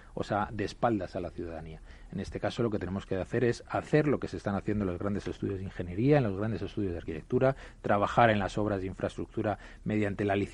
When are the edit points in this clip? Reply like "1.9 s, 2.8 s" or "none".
none